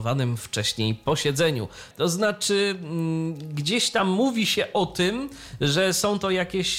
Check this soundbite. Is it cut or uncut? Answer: cut